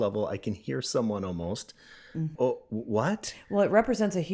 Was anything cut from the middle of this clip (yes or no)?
yes